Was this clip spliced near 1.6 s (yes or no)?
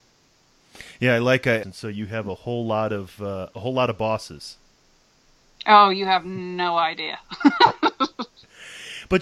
yes